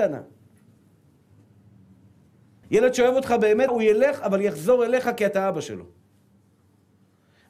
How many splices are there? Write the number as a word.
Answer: two